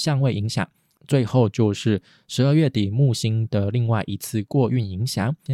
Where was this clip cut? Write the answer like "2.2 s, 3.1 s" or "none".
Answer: 1.0 s